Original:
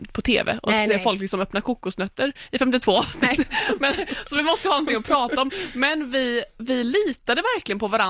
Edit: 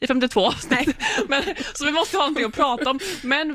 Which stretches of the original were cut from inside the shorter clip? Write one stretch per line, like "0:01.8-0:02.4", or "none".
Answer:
none